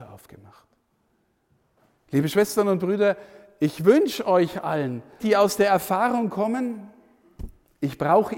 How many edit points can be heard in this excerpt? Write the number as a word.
one